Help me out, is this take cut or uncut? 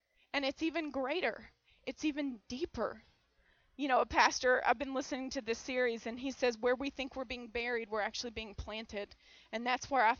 uncut